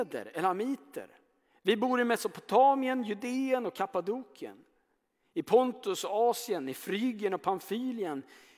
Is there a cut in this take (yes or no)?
no